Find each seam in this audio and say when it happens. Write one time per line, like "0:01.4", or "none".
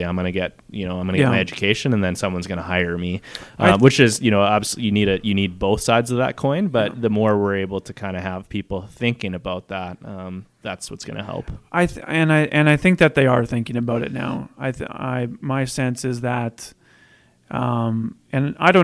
none